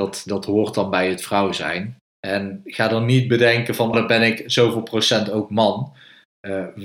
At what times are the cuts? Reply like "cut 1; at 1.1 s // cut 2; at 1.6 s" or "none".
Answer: cut 1; at 2.1 s // cut 2; at 3.9 s